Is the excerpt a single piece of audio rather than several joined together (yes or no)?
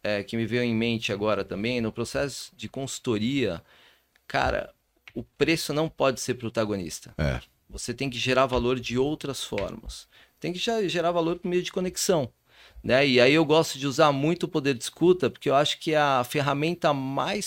yes